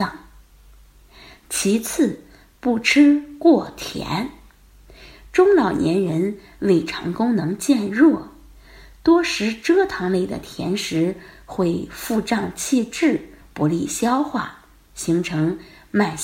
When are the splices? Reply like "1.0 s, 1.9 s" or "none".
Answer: none